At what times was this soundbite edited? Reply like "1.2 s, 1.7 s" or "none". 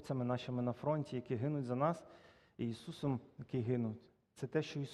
none